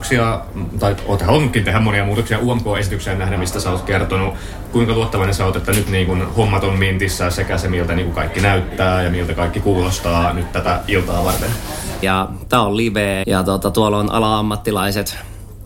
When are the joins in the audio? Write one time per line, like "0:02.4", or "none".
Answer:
0:03.4
0:12.0
0:13.2